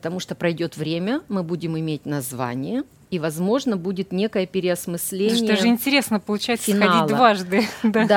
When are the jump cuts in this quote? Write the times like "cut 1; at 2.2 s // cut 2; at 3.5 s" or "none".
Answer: none